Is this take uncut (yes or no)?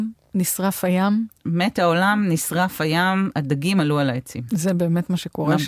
yes